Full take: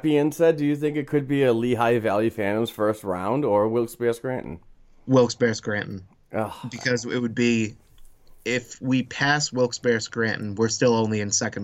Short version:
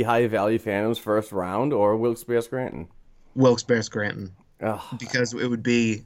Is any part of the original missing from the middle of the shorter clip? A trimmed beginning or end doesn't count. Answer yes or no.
no